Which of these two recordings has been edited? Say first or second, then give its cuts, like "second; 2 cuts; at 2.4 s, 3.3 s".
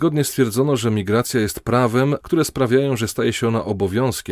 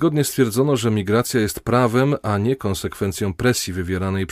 first; 1 cut; at 2.2 s